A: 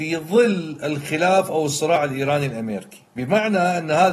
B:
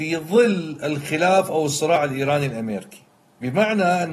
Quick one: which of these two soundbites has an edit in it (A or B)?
A